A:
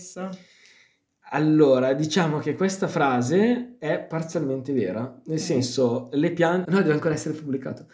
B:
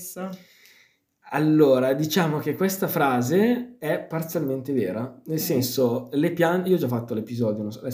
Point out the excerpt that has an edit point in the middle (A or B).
A